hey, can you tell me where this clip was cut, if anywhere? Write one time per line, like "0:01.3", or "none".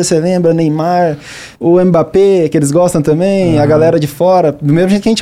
0:01.5